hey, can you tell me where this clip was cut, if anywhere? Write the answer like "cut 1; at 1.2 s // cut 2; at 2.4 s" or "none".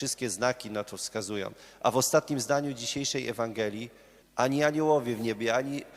cut 1; at 4.2 s